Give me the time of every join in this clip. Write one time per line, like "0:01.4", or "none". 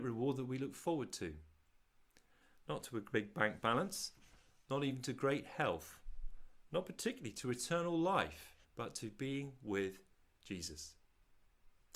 0:08.6